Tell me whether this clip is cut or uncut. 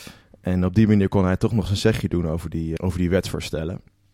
cut